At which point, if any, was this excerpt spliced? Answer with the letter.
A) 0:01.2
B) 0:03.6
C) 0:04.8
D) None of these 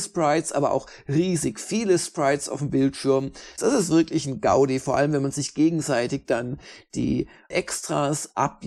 B